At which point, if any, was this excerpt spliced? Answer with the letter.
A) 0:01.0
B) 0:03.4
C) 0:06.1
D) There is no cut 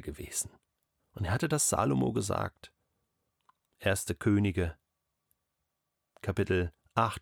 A